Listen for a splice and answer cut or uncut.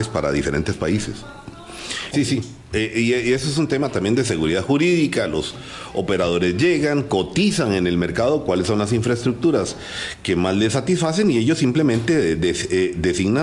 cut